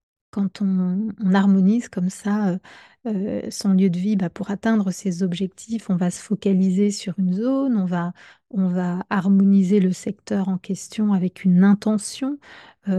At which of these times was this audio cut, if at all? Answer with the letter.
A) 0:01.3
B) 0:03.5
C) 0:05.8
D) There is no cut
D